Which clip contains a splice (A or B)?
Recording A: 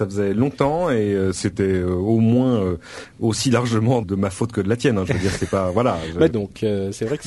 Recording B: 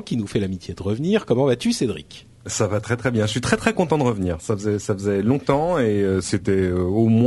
A